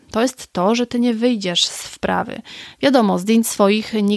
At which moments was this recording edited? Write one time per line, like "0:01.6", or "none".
none